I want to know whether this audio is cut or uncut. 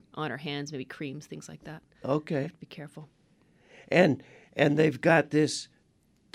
uncut